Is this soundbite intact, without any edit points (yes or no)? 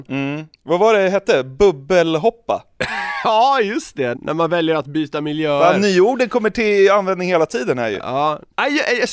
yes